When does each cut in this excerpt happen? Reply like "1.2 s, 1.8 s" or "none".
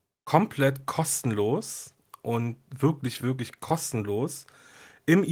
none